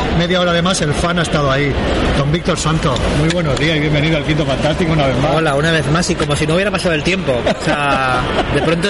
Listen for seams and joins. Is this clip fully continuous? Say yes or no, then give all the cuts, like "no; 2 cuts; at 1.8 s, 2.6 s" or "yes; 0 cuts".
yes; 0 cuts